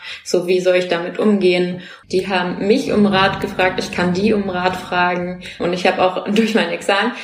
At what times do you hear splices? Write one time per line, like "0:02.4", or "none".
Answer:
0:02.0
0:05.6